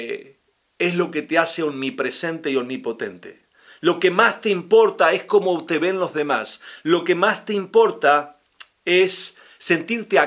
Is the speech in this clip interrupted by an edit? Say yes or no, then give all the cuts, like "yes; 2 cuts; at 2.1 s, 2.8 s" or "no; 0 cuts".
no; 0 cuts